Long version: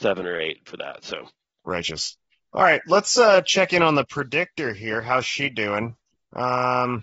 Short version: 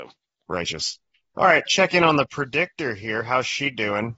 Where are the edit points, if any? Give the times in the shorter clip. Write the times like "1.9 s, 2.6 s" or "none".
1.7 s